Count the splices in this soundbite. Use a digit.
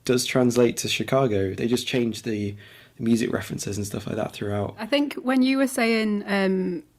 0